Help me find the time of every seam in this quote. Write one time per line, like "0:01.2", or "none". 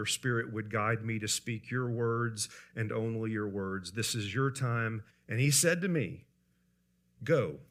0:05.1